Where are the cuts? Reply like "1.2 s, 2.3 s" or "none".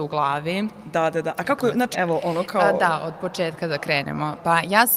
1.9 s